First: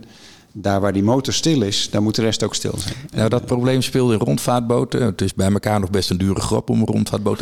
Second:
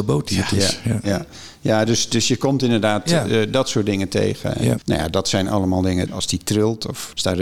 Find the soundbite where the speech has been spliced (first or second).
second